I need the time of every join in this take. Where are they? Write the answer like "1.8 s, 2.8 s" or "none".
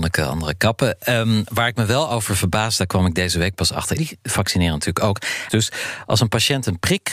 4.0 s, 5.5 s

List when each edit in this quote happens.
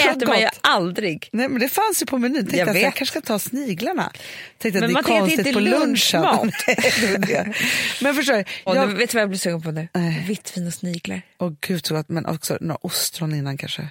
8.7 s

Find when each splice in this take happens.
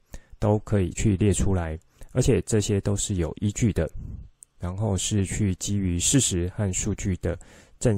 0.9 s

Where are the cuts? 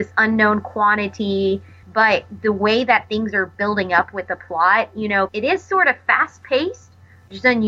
1.8 s, 5.3 s

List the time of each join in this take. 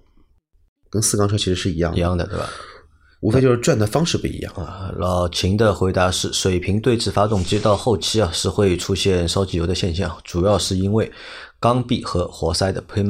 none

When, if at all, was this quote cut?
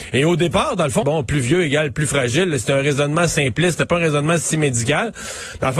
1.0 s

